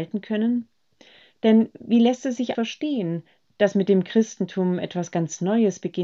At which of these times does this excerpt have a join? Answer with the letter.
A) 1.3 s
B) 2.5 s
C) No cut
B